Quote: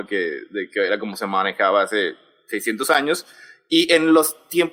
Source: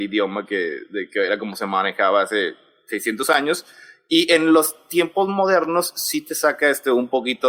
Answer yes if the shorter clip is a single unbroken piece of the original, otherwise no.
yes